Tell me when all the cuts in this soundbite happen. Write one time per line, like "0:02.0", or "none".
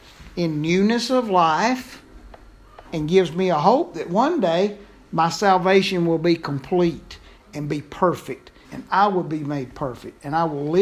0:02.8
0:08.6